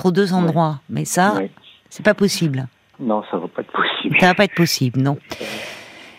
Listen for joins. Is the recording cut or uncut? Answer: uncut